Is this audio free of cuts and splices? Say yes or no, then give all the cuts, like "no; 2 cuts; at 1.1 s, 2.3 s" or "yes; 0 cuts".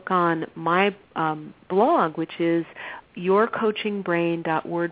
no; 2 cuts; at 1.0 s, 3.1 s